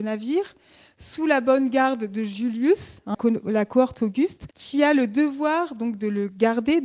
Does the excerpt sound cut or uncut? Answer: cut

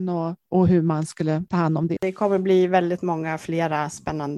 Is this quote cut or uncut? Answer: cut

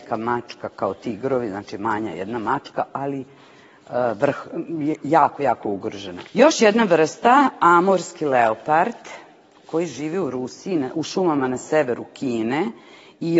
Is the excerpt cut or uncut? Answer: cut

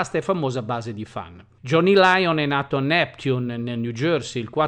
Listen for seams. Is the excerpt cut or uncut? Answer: uncut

